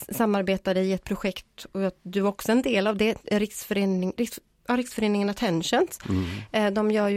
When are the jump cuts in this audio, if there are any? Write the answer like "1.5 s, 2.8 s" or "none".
none